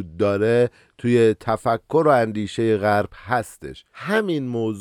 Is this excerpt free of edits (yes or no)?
no